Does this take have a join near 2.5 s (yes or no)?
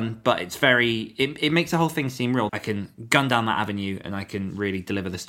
yes